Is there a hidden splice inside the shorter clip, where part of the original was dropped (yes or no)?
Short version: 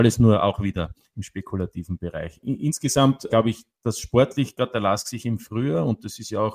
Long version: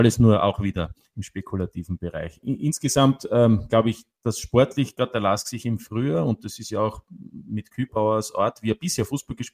yes